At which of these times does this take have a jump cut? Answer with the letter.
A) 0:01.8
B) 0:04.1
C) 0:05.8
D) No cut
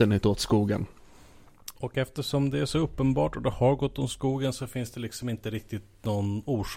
A